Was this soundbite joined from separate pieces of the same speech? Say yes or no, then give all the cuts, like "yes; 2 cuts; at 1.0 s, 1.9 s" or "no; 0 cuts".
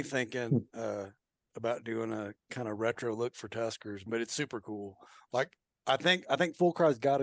yes; 1 cut; at 4.1 s